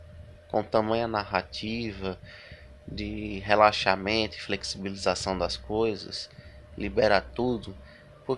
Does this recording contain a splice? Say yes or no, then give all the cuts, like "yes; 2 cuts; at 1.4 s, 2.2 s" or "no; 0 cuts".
no; 0 cuts